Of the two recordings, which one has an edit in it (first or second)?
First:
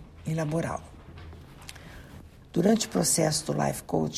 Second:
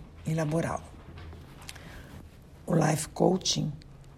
first